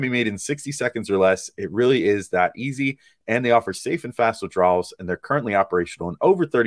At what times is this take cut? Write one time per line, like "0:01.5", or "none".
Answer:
none